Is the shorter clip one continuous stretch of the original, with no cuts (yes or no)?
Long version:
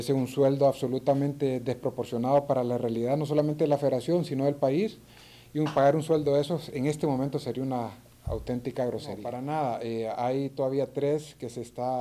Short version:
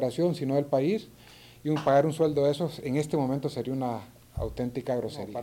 yes